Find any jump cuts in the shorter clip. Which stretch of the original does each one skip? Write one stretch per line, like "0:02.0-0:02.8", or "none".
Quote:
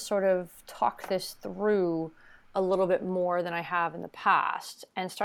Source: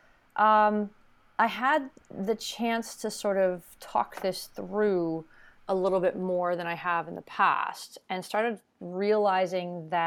none